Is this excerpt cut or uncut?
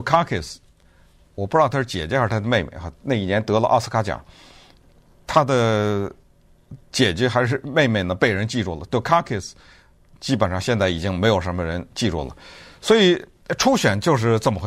uncut